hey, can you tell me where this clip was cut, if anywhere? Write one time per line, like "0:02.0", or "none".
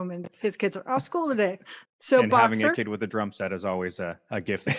0:01.8